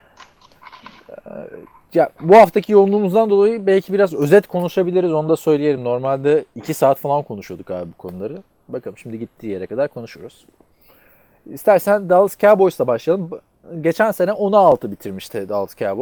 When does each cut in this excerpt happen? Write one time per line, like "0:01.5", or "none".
none